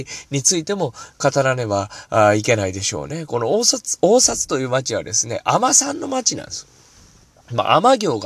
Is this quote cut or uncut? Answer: uncut